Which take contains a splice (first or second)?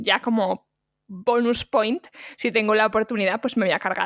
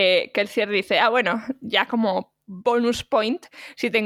second